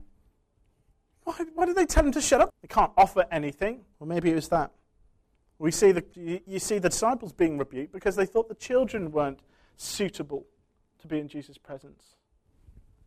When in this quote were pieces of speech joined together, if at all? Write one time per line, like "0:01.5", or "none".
0:02.5
0:03.9
0:06.1